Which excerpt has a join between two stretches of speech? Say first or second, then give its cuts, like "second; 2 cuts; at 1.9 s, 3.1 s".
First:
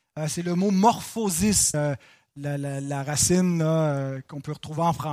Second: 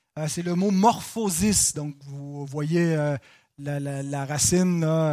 first; 1 cut; at 1.7 s